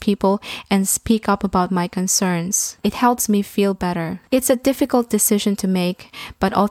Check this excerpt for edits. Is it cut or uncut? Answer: cut